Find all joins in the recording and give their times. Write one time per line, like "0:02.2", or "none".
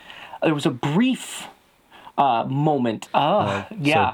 0:03.1